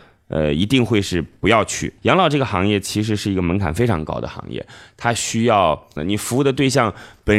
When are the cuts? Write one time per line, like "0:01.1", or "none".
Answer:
0:02.0
0:06.0